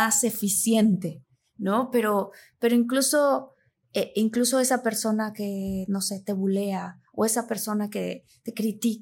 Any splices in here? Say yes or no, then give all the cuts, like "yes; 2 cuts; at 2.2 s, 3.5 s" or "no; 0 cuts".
no; 0 cuts